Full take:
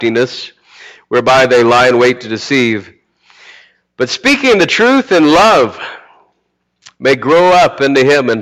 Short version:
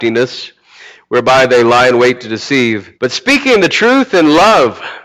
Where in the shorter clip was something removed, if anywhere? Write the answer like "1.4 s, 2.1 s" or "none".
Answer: 2.9 s